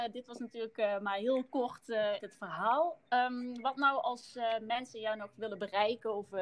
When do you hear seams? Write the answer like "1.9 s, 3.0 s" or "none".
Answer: 2.2 s